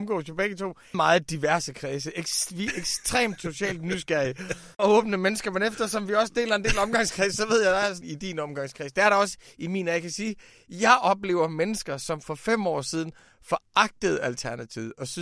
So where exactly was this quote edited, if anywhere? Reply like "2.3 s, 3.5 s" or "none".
0.9 s, 8.0 s